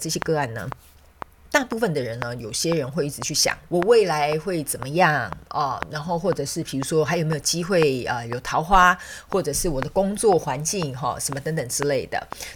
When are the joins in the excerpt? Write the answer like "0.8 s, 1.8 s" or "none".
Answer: 3.7 s